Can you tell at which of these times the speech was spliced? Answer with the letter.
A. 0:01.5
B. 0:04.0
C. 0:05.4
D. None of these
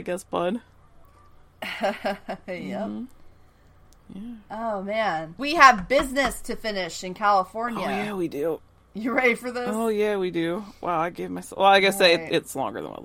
C